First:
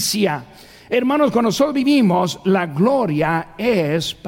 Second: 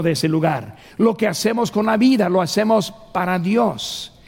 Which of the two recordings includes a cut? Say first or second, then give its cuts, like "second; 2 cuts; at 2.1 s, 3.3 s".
second; 1 cut; at 0.9 s